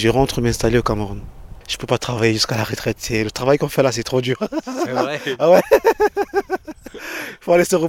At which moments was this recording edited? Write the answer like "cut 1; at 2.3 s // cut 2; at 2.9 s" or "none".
none